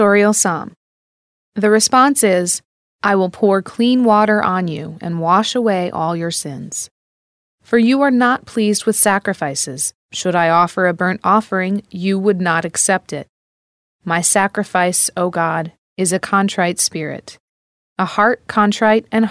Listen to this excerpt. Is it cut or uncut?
cut